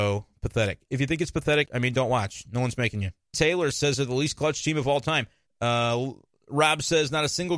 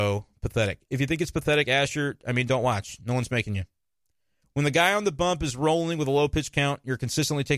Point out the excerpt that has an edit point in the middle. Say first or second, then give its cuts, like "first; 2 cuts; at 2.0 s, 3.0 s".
first; 3 cuts; at 1.7 s, 3.3 s, 5.5 s